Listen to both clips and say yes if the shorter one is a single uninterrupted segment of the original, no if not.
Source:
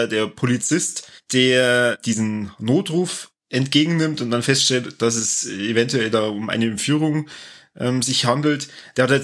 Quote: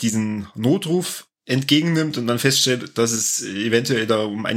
yes